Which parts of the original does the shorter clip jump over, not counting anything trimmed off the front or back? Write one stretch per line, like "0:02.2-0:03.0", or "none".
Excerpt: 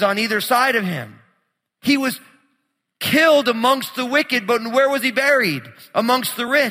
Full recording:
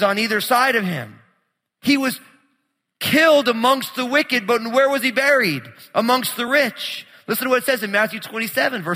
none